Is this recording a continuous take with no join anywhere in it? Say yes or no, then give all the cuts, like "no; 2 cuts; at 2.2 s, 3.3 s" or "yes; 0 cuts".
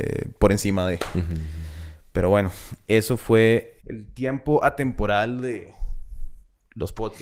no; 1 cut; at 3.8 s